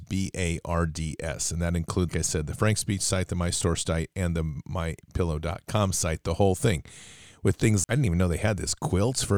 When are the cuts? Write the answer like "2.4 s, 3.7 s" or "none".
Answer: 2.1 s, 7.8 s